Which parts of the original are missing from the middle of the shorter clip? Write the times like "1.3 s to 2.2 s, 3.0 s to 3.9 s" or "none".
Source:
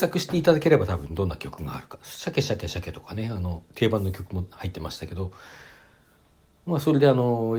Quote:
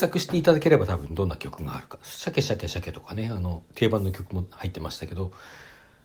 none